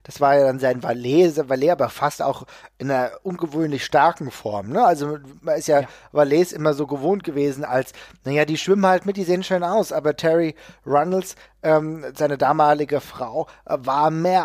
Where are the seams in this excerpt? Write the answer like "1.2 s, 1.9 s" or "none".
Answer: none